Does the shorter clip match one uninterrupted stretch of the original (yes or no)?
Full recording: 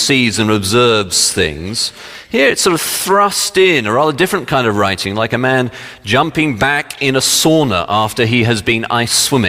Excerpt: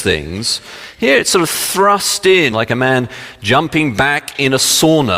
no